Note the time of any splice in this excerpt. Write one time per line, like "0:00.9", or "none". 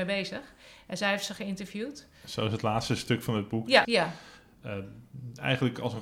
0:03.8